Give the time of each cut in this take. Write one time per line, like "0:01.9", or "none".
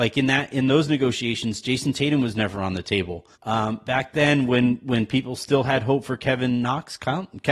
0:03.3